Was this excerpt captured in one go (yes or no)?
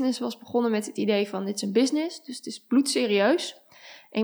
yes